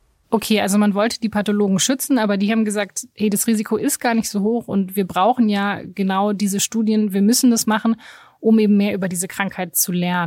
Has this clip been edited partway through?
no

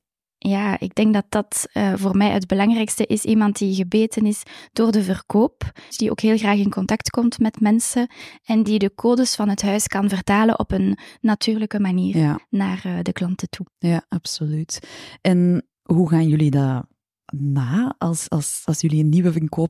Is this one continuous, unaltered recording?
no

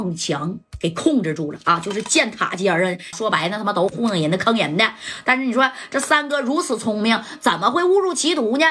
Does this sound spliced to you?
yes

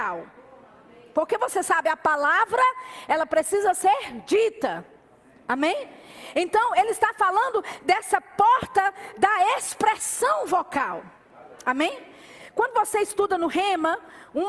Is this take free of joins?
yes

